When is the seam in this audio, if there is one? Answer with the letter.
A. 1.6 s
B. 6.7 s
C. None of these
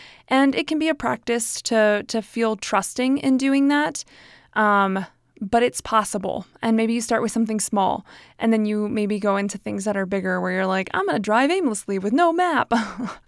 C